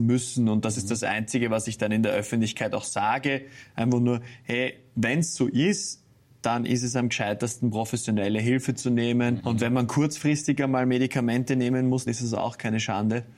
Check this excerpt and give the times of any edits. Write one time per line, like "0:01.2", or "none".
0:09.4
0:12.1